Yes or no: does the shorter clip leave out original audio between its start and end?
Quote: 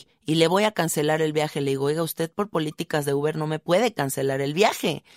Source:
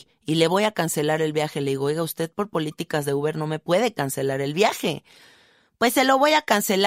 no